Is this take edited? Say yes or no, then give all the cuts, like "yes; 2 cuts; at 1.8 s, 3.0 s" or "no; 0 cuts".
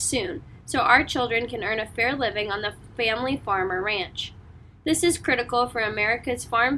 no; 0 cuts